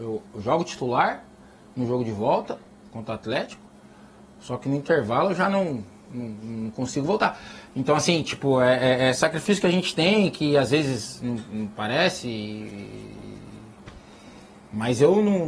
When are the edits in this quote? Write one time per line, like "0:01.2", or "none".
none

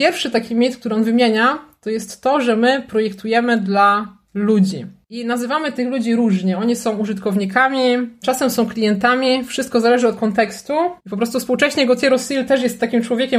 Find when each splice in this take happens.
0:08.2
0:11.0

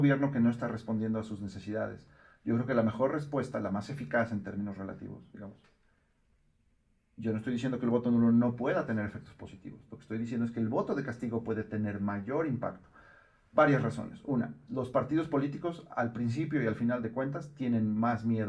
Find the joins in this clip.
none

